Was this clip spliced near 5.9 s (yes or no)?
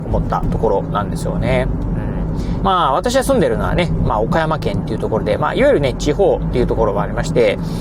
no